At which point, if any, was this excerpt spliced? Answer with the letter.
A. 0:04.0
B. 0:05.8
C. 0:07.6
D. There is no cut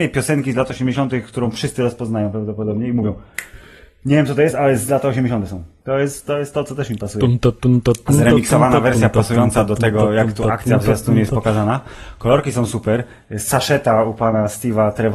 B